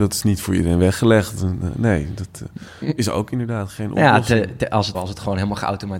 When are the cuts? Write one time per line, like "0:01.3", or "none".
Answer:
0:04.9